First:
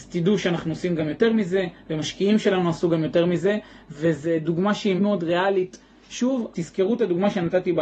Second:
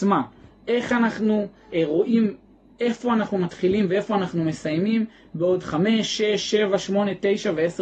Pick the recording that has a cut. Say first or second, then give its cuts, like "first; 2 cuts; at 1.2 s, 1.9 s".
first; 2 cuts; at 5.0 s, 6.5 s